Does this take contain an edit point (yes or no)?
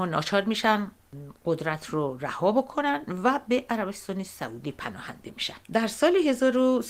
yes